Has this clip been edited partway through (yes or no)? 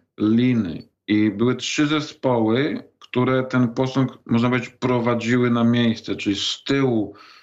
no